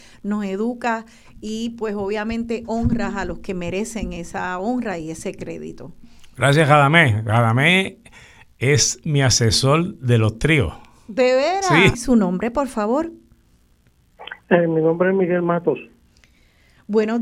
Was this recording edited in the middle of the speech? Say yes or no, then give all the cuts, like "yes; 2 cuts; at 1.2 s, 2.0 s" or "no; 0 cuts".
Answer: yes; 1 cut; at 11.9 s